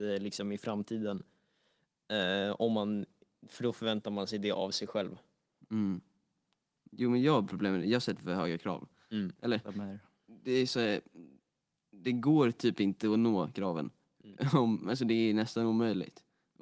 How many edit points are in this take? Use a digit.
0